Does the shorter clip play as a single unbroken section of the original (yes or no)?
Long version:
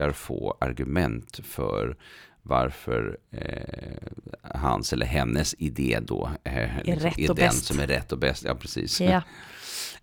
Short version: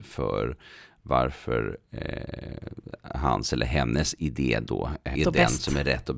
no